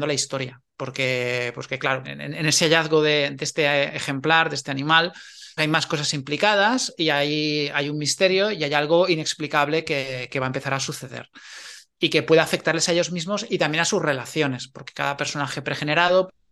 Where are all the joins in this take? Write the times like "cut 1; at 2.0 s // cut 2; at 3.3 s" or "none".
cut 1; at 2.0 s // cut 2; at 5.6 s